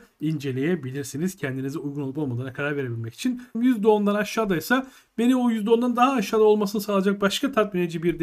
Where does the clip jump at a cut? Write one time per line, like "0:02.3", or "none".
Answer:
0:03.5